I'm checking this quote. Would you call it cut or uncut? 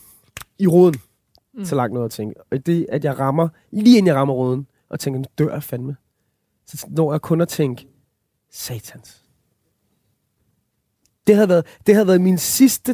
cut